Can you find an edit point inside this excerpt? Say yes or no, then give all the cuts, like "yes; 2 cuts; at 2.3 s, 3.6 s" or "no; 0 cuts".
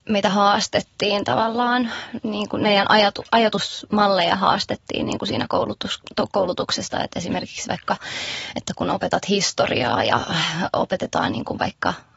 no; 0 cuts